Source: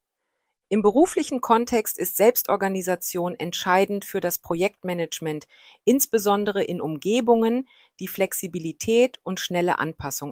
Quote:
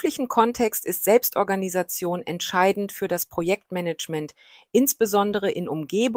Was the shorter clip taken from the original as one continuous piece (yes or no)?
yes